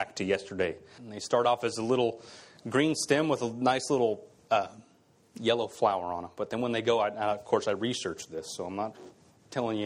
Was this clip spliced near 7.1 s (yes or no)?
no